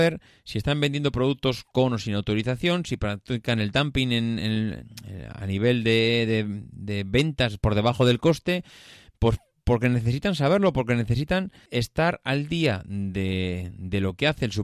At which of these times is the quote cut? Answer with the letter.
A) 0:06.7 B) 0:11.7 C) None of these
B